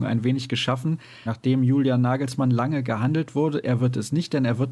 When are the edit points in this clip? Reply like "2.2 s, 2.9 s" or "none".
1.3 s, 3.6 s